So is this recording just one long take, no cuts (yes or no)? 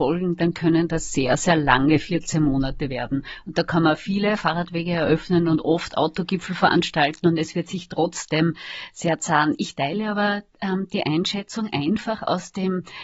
yes